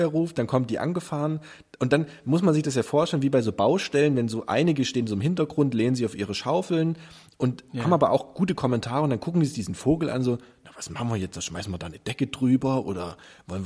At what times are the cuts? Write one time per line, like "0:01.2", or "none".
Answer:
none